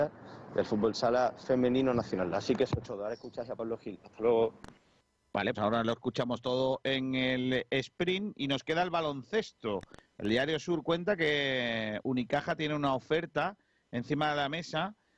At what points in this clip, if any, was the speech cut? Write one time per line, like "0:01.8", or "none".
0:05.5